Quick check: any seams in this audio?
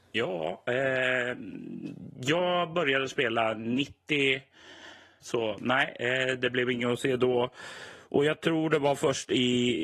yes; 1 cut; at 5.2 s

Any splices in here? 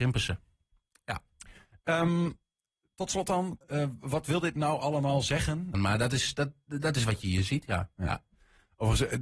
yes; 2 cuts; at 3.6 s, 5.7 s

